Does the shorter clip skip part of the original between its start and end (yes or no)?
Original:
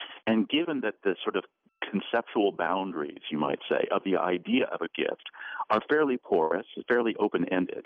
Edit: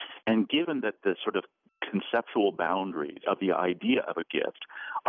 yes